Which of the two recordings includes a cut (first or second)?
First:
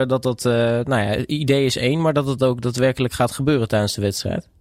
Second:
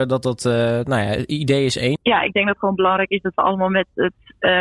second